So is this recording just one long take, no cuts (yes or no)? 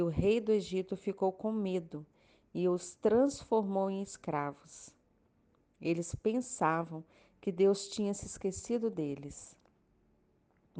yes